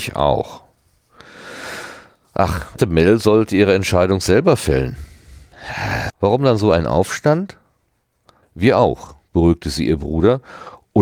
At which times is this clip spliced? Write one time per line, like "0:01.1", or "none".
0:02.8
0:06.1
0:08.4